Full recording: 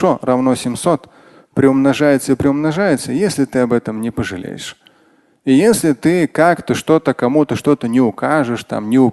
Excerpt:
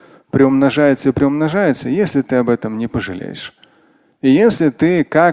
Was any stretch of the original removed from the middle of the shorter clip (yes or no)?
no